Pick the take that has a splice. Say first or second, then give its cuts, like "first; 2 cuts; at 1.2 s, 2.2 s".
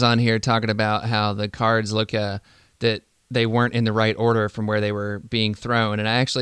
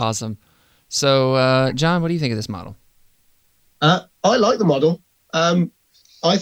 first; 1 cut; at 2.1 s